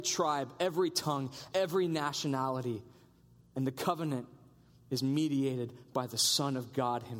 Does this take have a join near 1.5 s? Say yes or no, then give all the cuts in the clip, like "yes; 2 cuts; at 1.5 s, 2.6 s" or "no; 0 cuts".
yes; 1 cut; at 1.5 s